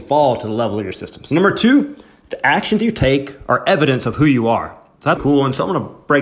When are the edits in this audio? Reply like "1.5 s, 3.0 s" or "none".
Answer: 5.2 s